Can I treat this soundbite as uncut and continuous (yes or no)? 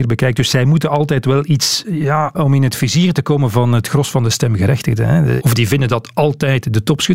no